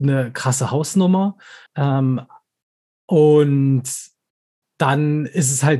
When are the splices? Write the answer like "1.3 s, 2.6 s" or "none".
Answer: 1.7 s